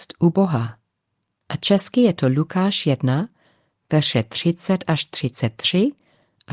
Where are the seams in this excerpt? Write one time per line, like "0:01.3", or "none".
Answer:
0:01.4